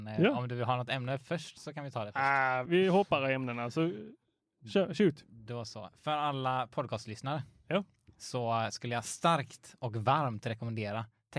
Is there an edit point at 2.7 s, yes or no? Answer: yes